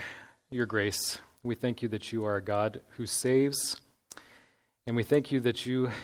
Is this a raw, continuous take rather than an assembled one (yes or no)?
yes